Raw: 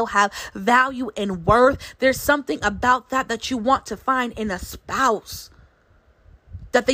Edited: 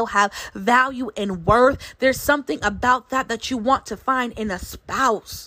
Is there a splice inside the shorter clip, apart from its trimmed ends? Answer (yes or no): no